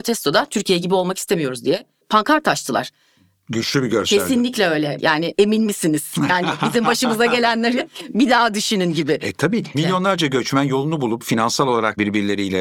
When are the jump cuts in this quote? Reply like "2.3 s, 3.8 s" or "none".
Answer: 5.0 s, 9.7 s